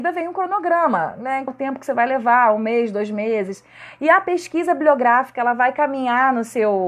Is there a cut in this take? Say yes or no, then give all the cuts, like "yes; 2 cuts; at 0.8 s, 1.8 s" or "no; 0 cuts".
yes; 1 cut; at 1.5 s